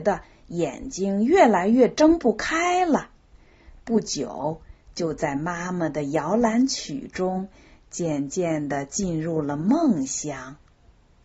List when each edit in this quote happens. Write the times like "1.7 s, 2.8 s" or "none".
none